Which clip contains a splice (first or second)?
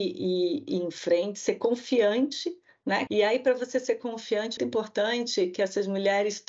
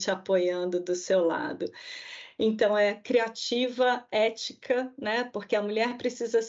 first